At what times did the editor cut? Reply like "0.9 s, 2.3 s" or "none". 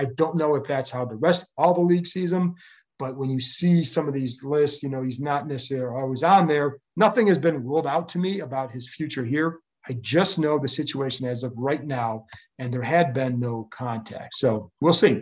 6.9 s